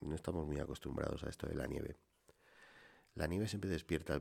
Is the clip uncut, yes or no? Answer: yes